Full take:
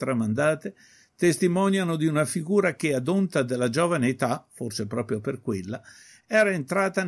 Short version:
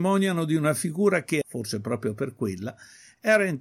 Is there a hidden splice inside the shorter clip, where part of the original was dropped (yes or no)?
yes